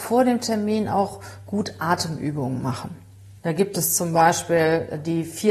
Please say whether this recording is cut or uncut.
cut